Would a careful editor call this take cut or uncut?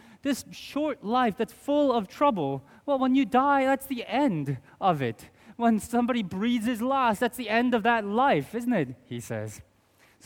uncut